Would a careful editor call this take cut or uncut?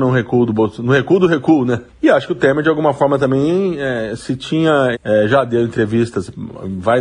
cut